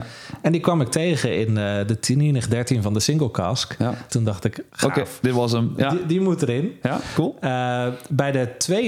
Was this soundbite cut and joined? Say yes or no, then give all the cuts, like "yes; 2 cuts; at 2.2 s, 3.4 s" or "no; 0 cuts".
yes; 1 cut; at 4.1 s